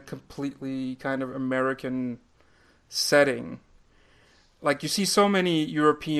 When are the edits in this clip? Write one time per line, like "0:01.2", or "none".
none